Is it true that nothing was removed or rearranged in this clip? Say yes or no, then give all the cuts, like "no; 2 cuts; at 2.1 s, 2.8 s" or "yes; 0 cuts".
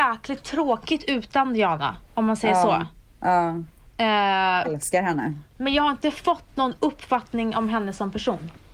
no; 1 cut; at 4.6 s